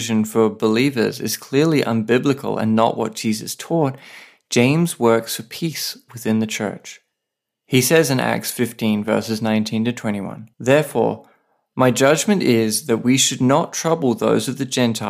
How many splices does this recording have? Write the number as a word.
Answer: one